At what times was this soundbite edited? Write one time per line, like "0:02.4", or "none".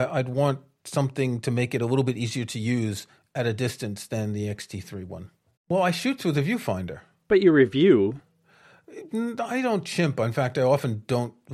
0:05.6